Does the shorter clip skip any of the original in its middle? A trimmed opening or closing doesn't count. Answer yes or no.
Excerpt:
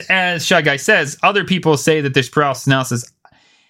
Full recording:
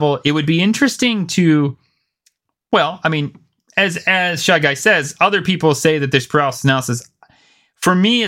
no